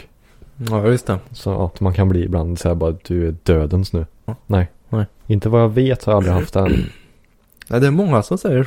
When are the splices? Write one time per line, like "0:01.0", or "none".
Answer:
0:01.7
0:04.3